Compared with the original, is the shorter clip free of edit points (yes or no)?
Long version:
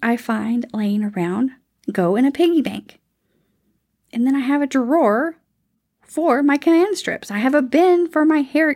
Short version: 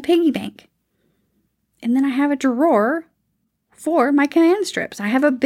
yes